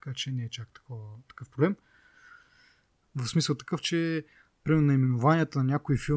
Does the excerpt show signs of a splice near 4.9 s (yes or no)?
no